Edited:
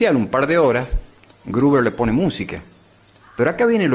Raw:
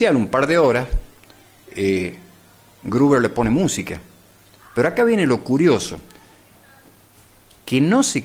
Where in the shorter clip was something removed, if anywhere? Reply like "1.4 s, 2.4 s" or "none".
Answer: 1.3 s

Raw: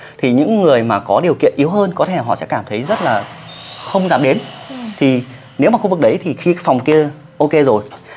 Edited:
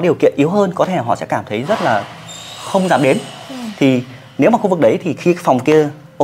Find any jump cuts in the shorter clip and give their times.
none

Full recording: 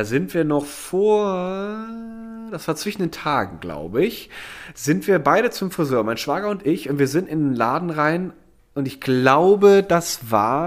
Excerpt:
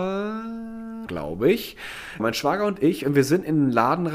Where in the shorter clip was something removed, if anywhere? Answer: 1.1 s, 2.2 s

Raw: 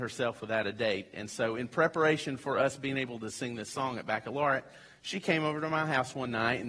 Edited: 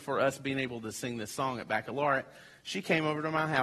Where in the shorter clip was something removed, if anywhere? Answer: none

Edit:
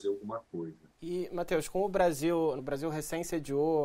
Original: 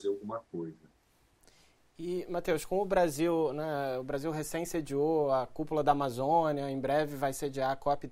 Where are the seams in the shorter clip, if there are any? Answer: 0.9 s, 2.6 s

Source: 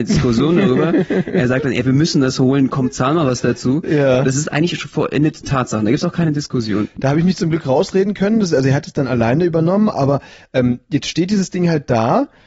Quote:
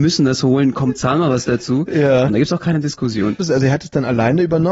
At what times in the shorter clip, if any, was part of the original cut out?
2.3 s, 3.4 s

